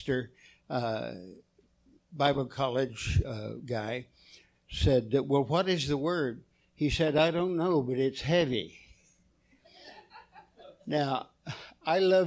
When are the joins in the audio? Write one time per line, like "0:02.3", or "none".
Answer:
none